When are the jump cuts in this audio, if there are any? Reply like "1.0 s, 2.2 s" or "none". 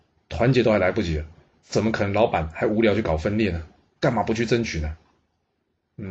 4.0 s